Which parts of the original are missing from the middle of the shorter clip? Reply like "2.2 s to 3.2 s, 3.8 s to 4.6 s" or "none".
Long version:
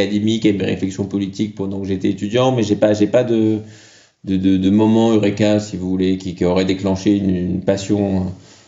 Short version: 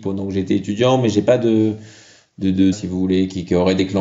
2.8 s to 3.1 s, 4.6 s to 5.6 s